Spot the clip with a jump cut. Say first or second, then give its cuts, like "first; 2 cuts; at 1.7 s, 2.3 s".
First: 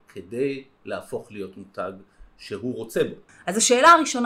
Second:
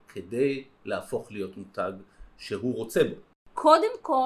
first; 1 cut; at 3.3 s